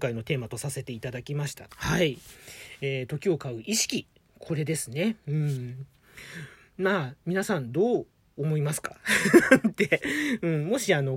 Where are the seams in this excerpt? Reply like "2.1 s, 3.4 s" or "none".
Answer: 1.7 s